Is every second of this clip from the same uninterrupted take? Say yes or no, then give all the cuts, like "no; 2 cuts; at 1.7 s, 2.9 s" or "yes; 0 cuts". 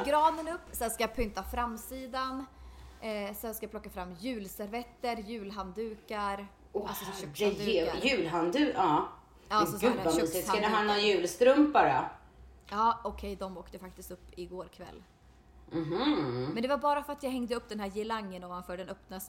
yes; 0 cuts